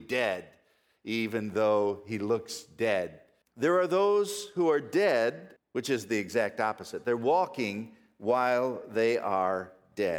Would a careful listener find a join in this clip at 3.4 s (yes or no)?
yes